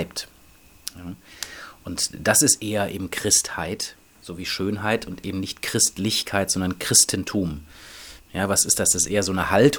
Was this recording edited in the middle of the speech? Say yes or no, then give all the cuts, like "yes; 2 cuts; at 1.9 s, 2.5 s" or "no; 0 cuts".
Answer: yes; 1 cut; at 8.2 s